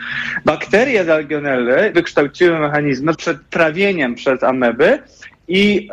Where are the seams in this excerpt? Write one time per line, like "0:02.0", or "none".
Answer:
0:01.9
0:03.1